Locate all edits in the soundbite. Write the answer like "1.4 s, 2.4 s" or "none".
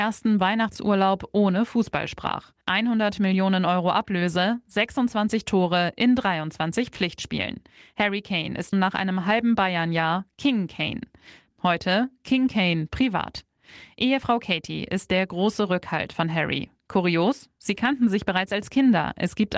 2.6 s, 8.7 s, 11.5 s